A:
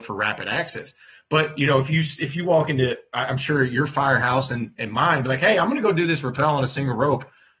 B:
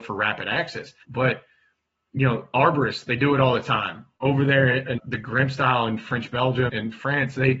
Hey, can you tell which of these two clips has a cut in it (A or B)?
B